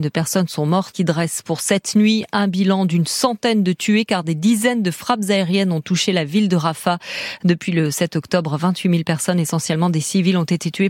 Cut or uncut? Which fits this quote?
cut